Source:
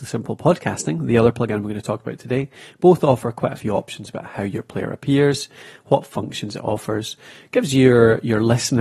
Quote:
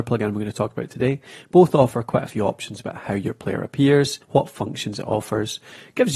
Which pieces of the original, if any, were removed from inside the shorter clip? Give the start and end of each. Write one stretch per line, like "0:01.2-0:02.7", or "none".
0:05.5-0:05.8